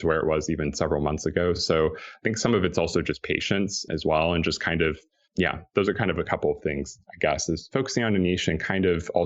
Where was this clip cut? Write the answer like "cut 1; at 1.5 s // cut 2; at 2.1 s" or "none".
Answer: none